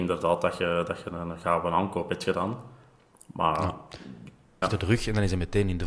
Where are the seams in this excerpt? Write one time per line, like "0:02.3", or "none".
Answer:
0:04.6

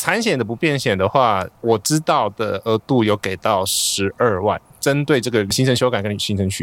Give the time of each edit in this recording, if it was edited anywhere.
none

